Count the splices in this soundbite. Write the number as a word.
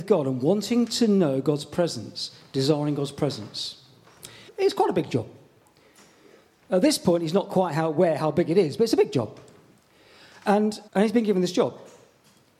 two